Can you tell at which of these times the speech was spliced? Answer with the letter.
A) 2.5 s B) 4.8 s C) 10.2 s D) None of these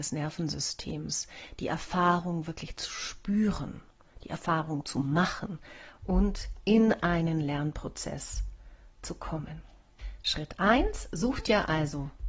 D